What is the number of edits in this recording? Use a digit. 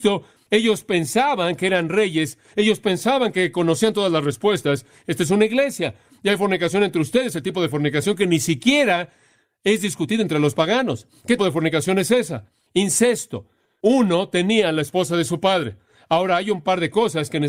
1